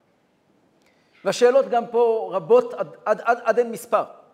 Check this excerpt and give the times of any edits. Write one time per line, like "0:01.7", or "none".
none